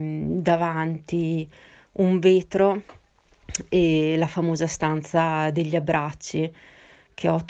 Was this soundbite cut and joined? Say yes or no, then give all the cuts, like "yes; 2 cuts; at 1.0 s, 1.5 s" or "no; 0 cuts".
no; 0 cuts